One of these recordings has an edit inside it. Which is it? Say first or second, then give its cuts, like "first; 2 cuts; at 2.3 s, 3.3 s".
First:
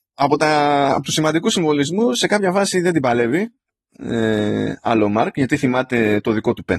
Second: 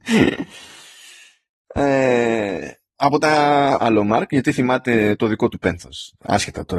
second; 1 cut; at 3.7 s